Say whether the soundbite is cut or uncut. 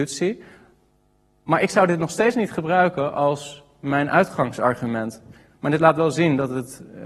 uncut